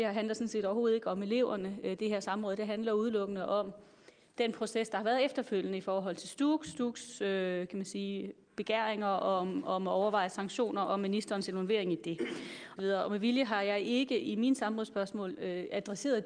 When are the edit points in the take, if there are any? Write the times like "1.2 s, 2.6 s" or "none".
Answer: 12.8 s